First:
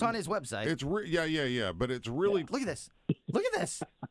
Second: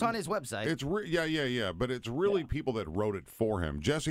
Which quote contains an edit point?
first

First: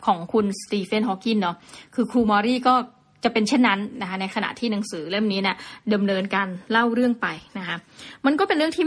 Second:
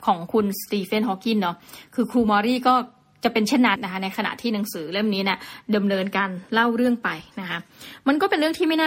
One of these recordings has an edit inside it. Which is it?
second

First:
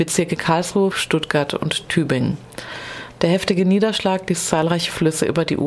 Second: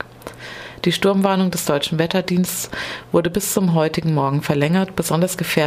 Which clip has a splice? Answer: first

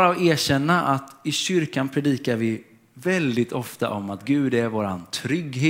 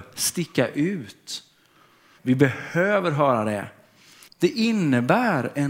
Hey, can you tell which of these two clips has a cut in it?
second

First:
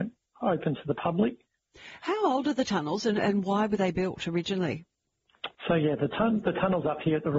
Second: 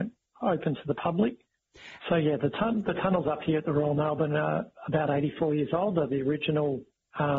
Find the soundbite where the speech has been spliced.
second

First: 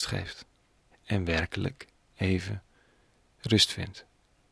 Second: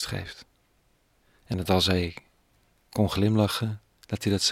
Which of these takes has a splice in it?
first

